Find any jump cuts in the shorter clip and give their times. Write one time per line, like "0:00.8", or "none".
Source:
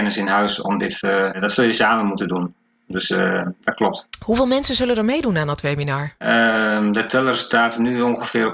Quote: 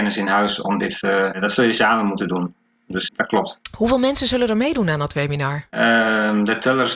0:03.1